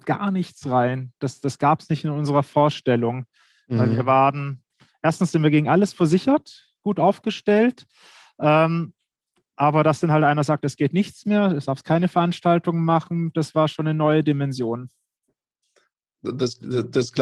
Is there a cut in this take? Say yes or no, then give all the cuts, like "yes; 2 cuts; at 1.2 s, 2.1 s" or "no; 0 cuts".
no; 0 cuts